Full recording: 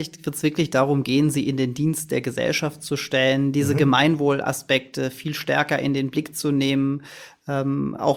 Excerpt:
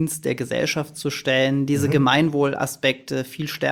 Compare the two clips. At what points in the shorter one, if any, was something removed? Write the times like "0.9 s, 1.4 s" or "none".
none